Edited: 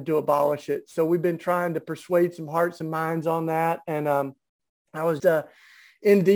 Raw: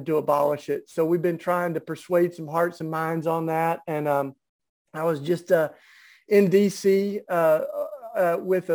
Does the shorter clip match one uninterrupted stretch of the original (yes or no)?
no